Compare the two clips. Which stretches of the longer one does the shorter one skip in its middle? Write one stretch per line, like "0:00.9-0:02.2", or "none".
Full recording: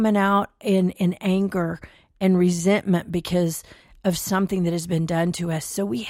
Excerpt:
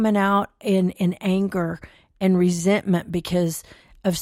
none